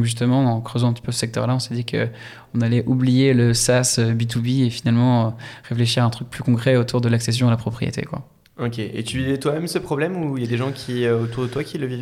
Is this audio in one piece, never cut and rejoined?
yes; 0 cuts

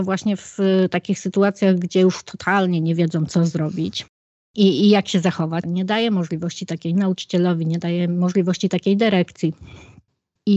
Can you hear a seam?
yes; 1 cut; at 5.6 s

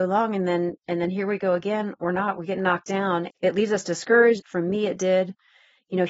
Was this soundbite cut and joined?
yes; 2 cuts; at 3.3 s, 4.4 s

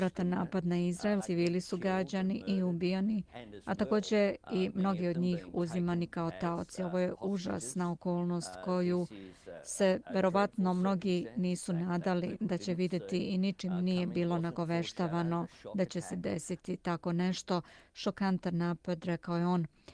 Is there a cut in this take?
yes; 1 cut; at 1.2 s

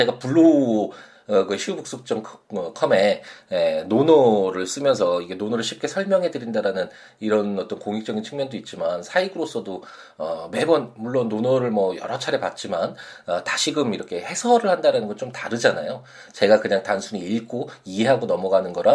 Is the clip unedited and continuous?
yes; 0 cuts

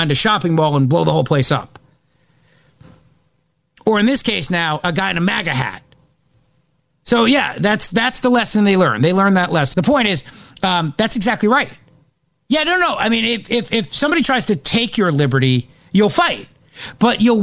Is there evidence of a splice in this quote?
yes; 1 cut; at 9.7 s

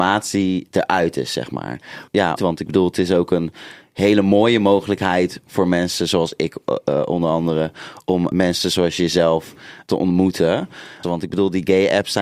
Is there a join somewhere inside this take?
yes; 2 cuts; at 2.4 s, 11.0 s

